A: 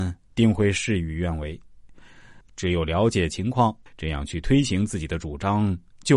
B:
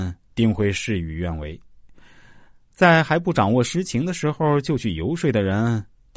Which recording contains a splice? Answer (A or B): A